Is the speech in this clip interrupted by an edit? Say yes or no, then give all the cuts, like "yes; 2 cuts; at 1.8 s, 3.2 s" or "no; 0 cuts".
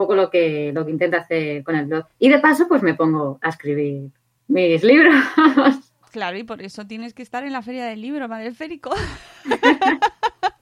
no; 0 cuts